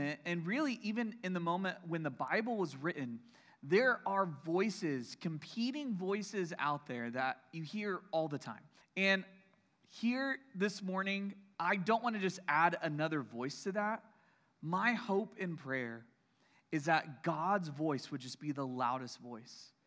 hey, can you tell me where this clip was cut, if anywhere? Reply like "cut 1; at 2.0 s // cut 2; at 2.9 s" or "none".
cut 1; at 8.8 s